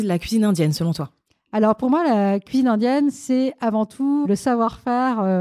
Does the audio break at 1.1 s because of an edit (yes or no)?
no